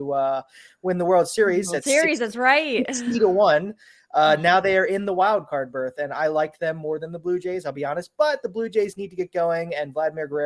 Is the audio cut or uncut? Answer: uncut